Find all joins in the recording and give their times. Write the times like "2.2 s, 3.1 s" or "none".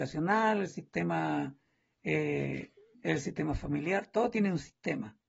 2.9 s